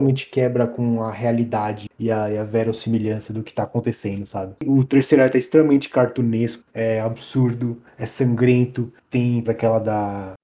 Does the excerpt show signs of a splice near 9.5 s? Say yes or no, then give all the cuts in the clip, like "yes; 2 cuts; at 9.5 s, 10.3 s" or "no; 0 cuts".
yes; 2 cuts; at 4.6 s, 9.5 s